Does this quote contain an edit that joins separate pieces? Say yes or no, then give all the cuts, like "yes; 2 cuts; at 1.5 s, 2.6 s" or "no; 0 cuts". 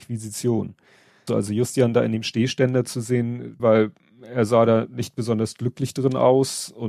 yes; 2 cuts; at 1.3 s, 3.6 s